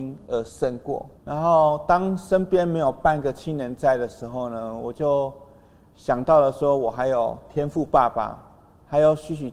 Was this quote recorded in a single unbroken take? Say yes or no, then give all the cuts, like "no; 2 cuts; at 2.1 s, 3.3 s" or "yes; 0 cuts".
no; 1 cut; at 1.2 s